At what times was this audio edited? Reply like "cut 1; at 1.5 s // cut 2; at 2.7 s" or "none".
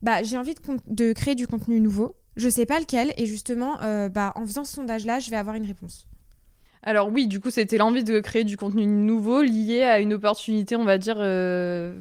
none